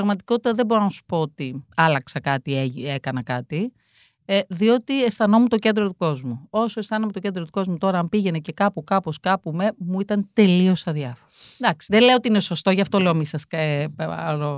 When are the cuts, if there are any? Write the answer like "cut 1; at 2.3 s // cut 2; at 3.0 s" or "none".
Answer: none